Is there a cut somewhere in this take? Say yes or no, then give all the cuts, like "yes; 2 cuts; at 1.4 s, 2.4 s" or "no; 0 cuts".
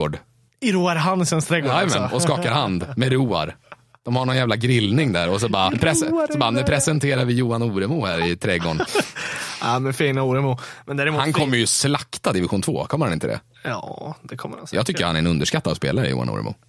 yes; 2 cuts; at 5.7 s, 8.9 s